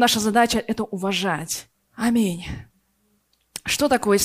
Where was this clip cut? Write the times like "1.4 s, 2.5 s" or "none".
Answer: 1.7 s